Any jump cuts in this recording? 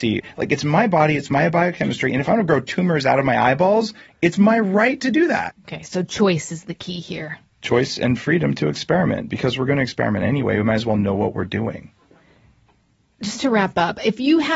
no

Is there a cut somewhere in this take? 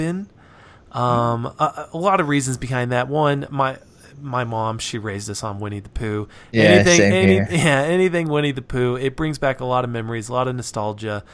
no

